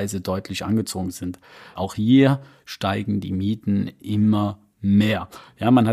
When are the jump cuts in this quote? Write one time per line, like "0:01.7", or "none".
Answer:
0:01.8